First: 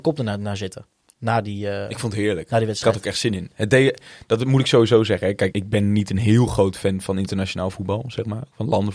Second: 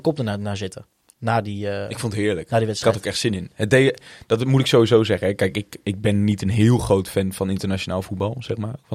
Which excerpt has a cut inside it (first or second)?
first